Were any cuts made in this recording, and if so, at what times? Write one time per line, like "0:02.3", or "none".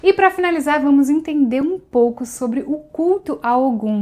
none